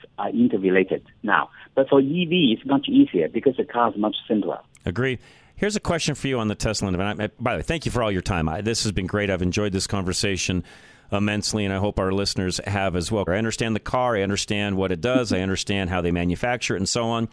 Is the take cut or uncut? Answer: cut